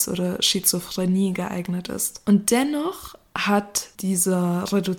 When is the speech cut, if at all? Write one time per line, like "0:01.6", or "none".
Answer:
0:02.2

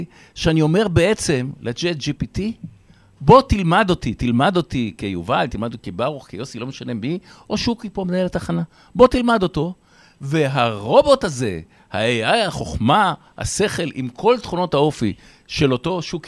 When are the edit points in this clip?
none

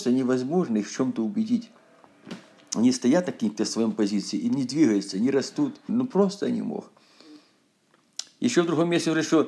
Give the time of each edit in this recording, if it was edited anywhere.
0:05.9

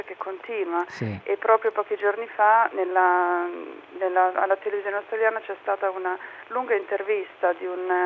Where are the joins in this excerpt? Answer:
none

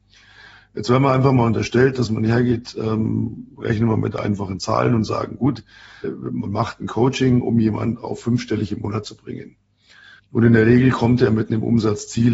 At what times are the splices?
0:06.0
0:10.2

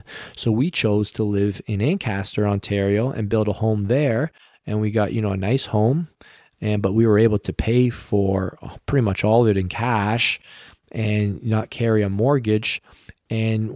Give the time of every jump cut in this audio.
none

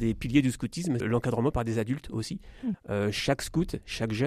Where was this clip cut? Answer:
0:01.0
0:02.7

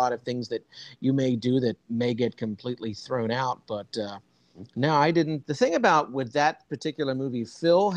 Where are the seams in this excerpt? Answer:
0:01.8
0:05.4

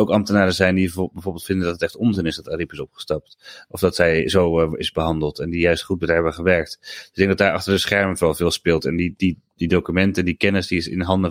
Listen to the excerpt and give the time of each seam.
none

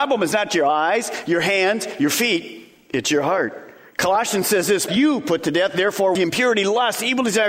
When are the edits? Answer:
0:04.9
0:06.2

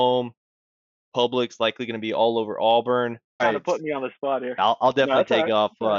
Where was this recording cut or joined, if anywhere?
0:03.4
0:04.6

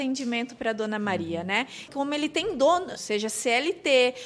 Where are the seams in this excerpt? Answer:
0:01.9
0:03.0

